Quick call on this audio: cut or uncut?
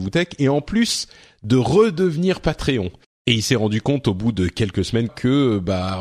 cut